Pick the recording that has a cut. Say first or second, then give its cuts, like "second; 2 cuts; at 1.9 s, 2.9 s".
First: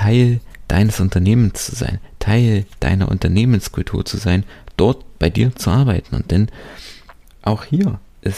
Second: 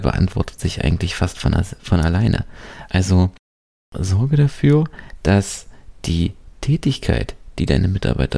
second; 1 cut; at 2.9 s